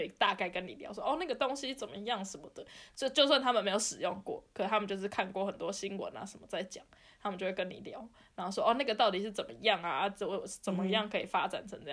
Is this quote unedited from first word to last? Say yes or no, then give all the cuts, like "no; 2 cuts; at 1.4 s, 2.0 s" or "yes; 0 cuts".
yes; 0 cuts